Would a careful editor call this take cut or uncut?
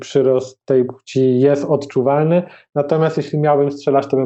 uncut